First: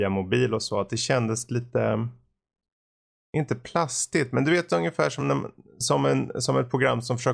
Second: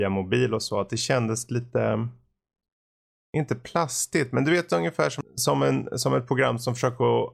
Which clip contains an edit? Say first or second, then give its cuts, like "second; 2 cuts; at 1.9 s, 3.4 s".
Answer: second; 1 cut; at 5.2 s